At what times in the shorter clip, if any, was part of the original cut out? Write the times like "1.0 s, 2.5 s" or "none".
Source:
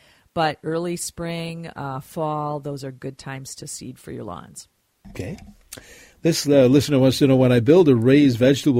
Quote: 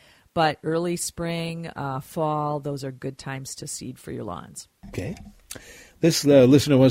4.8 s